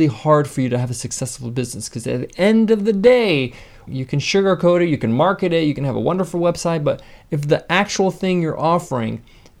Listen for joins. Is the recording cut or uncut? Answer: cut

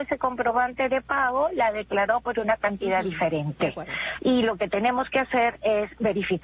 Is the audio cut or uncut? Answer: cut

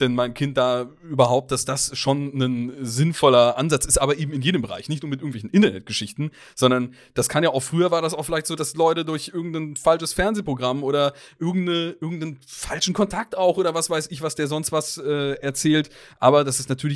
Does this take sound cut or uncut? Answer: cut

